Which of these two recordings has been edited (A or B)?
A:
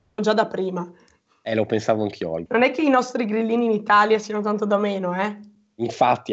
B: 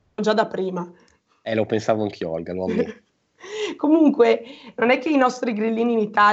A